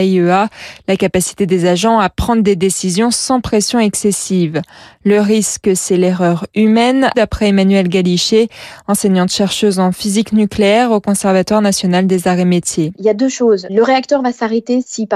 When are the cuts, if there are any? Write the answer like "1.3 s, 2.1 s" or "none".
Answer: 7.1 s, 12.9 s